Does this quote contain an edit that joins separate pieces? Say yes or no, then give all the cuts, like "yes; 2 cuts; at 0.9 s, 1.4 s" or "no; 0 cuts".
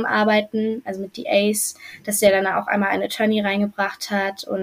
no; 0 cuts